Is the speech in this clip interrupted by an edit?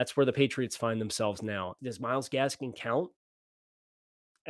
yes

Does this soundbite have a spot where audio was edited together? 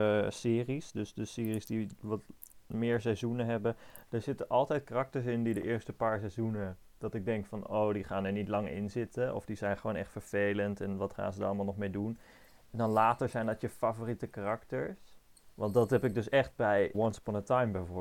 yes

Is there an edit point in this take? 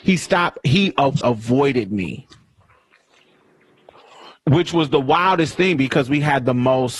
yes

